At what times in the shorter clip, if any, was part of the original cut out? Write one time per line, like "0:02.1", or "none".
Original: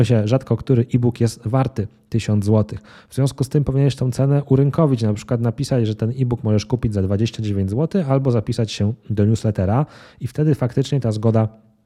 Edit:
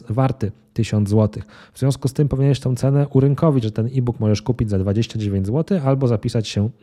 0:03.6